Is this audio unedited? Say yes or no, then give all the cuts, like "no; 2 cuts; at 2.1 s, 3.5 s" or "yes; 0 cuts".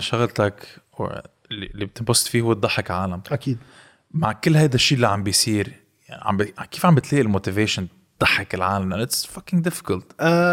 yes; 0 cuts